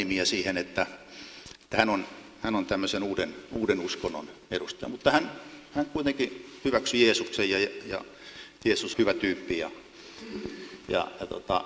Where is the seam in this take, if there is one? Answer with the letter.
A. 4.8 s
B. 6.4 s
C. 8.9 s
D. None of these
C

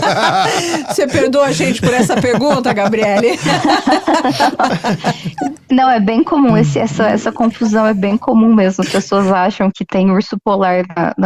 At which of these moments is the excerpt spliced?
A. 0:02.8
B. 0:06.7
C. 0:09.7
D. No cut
C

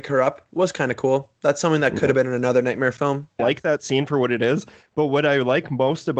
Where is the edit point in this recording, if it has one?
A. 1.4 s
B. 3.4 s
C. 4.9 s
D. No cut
B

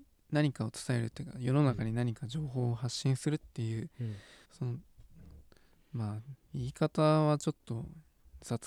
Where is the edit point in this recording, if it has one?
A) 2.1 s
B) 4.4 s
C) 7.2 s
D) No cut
B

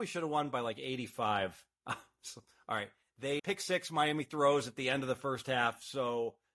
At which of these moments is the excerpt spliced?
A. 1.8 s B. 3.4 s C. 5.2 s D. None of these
B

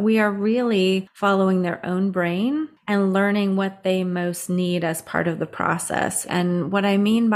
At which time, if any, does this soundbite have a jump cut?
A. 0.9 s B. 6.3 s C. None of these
B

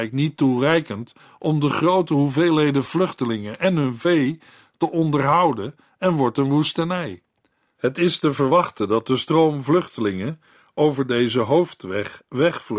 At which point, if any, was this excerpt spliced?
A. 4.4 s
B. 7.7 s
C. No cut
B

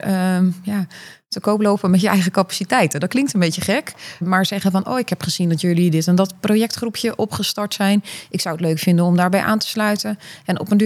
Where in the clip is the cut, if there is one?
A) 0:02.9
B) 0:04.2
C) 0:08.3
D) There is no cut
B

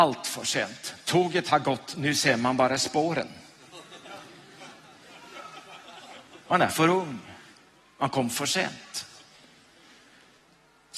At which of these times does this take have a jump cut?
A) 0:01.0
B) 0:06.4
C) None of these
C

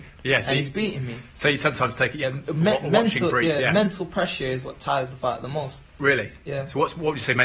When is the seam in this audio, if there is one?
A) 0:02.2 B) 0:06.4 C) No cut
A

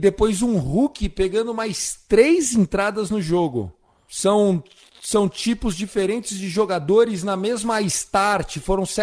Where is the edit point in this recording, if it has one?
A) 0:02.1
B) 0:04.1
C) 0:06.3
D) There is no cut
D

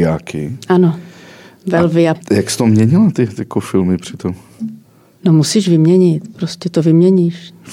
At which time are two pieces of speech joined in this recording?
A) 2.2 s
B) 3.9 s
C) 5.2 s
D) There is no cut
A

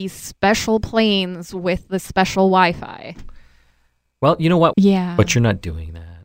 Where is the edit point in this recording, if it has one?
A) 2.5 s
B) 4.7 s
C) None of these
B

